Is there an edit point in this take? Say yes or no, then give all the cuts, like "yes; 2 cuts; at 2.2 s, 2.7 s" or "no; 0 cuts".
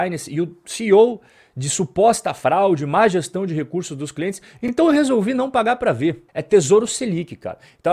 yes; 1 cut; at 6.3 s